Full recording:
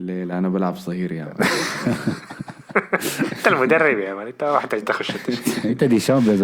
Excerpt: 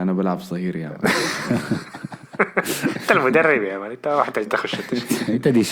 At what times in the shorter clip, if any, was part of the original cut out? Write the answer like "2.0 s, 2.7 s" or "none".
none